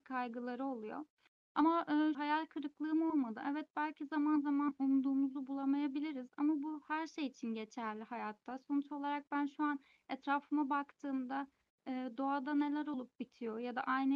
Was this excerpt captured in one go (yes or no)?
no